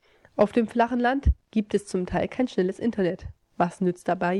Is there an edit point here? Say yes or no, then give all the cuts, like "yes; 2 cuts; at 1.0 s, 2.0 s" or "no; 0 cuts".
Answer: no; 0 cuts